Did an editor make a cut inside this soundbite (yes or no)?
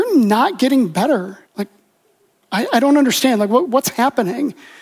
yes